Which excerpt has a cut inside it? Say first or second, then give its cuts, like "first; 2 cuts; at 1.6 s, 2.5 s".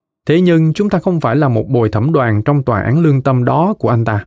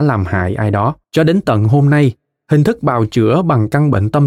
second; 1 cut; at 1.0 s